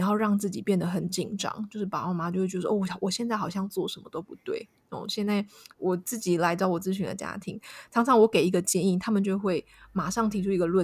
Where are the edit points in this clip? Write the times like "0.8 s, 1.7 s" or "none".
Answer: none